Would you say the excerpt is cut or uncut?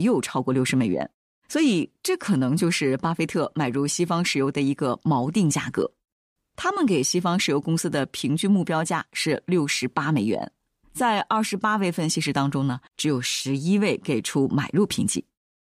cut